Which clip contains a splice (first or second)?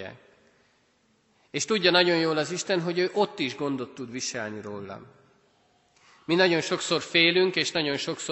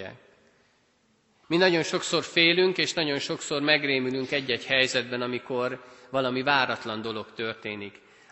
second